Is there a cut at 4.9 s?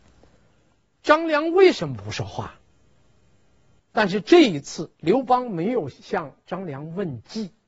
yes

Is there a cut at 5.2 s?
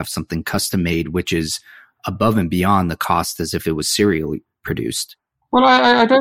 no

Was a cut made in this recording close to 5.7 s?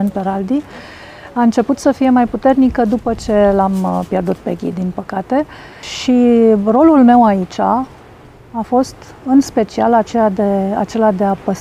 no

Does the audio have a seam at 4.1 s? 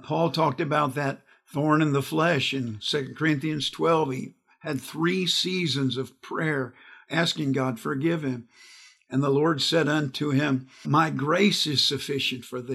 no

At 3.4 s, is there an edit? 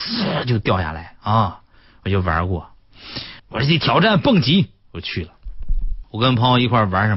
yes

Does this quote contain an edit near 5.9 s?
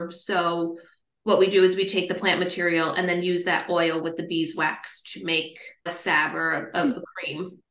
yes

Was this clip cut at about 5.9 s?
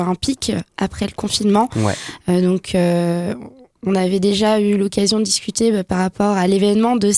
no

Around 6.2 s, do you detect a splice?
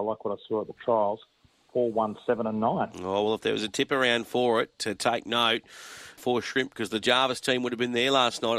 yes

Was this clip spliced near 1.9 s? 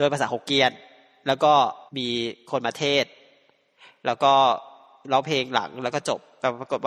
yes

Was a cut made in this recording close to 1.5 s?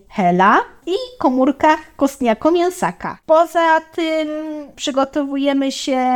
no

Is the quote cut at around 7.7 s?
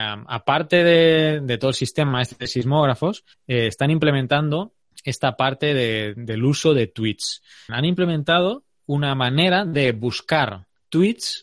yes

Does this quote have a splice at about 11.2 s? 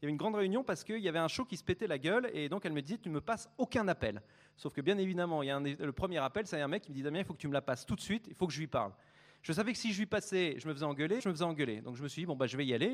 yes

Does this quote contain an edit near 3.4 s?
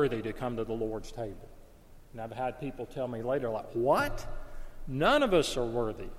no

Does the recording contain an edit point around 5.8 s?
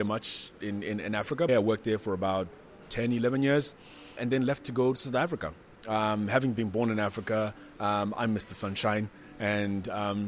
no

